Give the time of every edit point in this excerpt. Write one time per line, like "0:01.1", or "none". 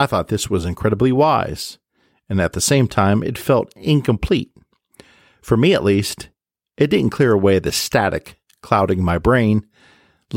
none